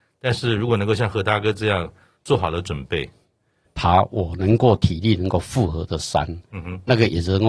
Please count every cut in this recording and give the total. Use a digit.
1